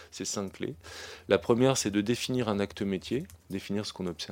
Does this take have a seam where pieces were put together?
yes; 1 cut; at 3.4 s

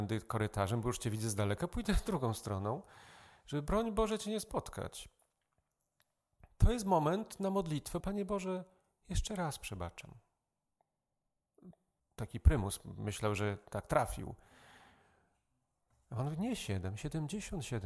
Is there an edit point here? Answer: yes; 2 cuts; at 8.0 s, 12.0 s

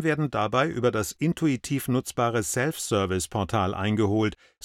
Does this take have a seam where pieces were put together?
no; 0 cuts

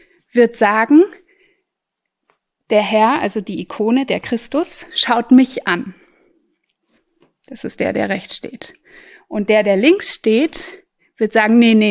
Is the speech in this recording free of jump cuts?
yes; 0 cuts

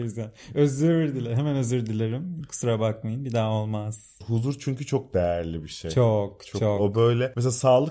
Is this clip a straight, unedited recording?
no; 1 cut; at 4.2 s

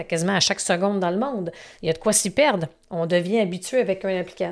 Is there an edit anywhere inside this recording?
no; 0 cuts

